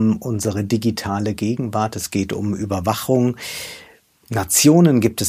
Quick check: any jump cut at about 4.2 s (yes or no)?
no